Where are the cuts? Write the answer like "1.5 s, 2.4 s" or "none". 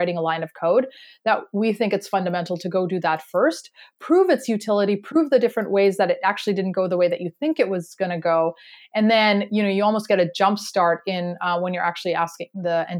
none

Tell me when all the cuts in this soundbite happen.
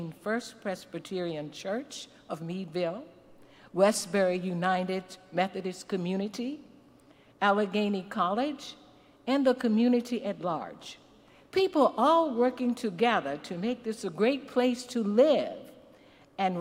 none

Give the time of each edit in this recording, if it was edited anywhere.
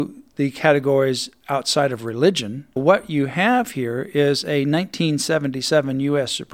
2.8 s

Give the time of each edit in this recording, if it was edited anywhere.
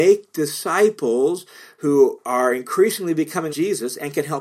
3.5 s

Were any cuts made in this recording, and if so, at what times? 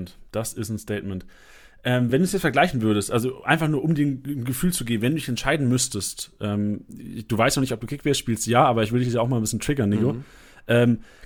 none

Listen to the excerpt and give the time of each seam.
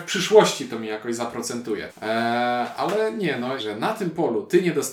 1.9 s, 3.6 s

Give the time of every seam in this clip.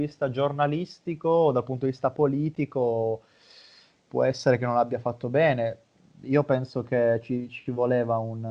none

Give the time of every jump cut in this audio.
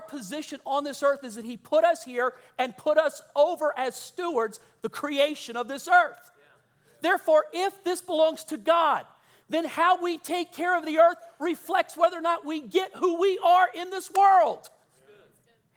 none

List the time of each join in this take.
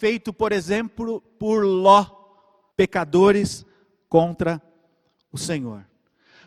2.7 s

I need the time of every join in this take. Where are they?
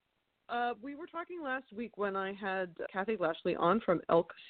2.9 s

